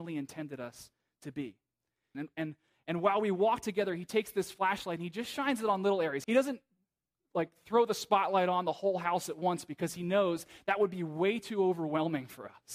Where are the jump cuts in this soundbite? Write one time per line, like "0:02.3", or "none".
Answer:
0:02.1
0:06.2